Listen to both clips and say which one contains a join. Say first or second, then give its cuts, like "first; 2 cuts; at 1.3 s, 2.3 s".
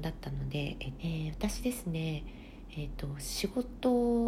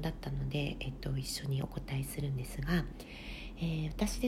first; 1 cut; at 1.0 s